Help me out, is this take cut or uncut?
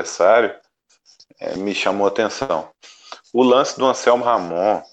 cut